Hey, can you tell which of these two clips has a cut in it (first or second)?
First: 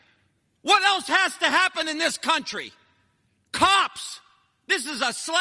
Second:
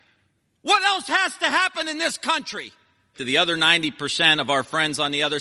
second